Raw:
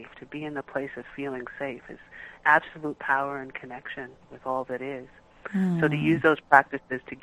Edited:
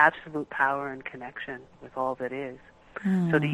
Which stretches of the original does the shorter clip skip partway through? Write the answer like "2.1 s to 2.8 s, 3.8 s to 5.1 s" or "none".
none